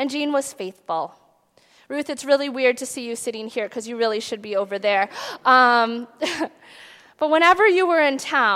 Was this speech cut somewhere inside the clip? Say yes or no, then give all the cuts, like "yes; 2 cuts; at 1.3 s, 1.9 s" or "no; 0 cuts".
no; 0 cuts